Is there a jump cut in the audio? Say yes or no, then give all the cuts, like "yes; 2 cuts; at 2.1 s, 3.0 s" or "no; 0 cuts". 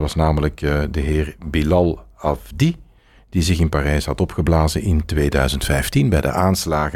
no; 0 cuts